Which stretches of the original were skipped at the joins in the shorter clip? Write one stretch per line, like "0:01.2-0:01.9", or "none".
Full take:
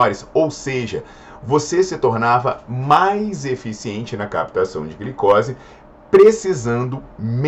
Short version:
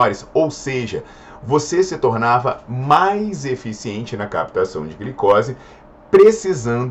none